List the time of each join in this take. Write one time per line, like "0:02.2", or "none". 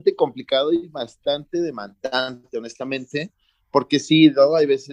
none